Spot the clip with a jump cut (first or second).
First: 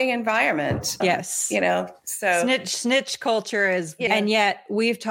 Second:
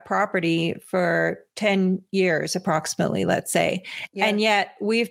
first